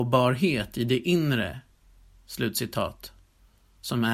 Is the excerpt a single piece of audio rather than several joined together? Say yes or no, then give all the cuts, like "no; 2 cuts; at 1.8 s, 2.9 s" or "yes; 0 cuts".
yes; 0 cuts